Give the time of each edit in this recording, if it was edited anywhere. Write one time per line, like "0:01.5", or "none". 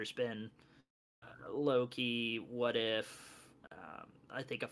0:01.2